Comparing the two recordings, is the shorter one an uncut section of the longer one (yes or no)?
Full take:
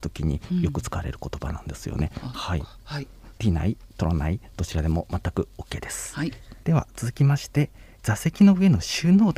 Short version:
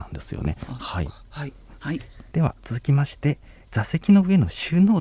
no